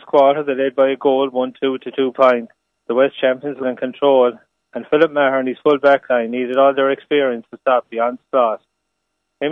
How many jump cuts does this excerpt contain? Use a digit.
1